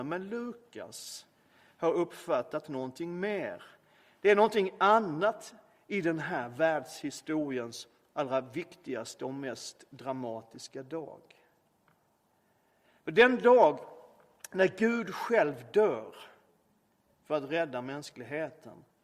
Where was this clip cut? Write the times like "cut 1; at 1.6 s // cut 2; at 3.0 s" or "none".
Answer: none

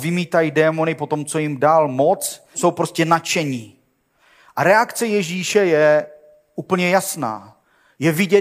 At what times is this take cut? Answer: cut 1; at 2.5 s

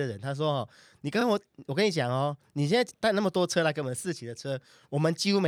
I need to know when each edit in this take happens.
none

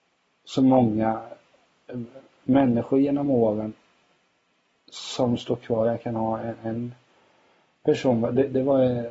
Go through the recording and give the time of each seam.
none

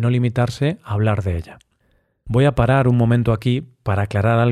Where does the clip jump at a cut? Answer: none

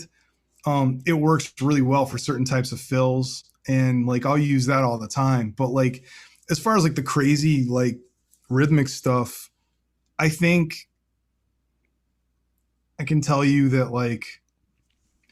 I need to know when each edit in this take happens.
none

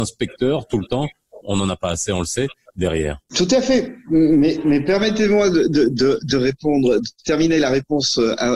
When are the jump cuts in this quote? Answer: none

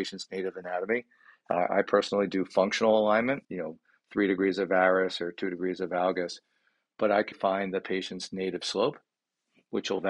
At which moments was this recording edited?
cut 1; at 3.4 s // cut 2; at 7.3 s

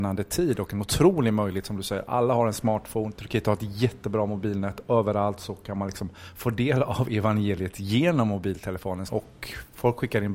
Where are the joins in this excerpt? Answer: cut 1; at 9.1 s

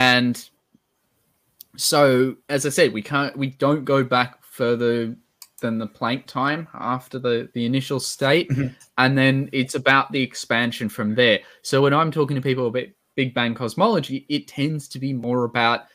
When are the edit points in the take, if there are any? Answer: cut 1; at 2.4 s

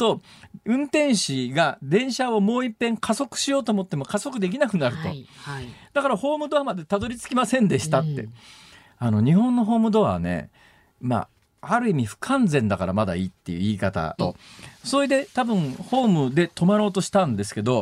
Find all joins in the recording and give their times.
cut 1; at 14.2 s

